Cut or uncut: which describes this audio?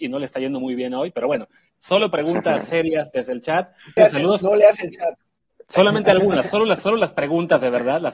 cut